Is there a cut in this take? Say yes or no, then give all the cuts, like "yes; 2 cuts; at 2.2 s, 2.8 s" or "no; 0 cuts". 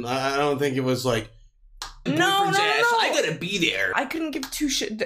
yes; 2 cuts; at 2.1 s, 3.9 s